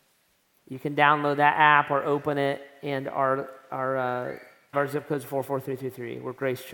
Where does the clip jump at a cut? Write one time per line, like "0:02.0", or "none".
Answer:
0:04.7